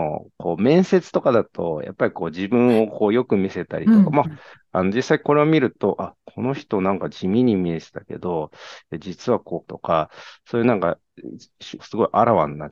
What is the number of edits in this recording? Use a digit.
3